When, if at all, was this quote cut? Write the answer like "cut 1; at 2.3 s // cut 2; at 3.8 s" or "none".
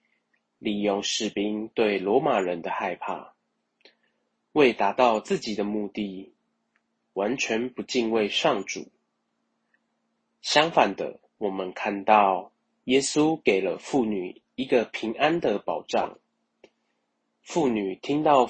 cut 1; at 11.3 s